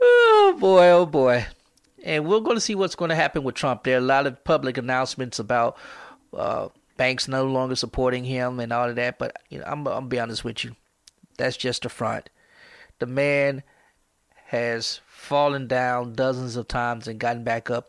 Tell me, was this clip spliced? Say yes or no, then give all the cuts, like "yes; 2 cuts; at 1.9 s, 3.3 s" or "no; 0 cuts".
no; 0 cuts